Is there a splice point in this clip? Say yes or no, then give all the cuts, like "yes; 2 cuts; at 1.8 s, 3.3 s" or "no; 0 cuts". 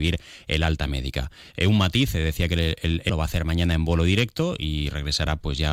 yes; 1 cut; at 3.1 s